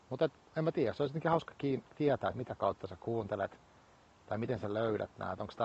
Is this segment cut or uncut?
uncut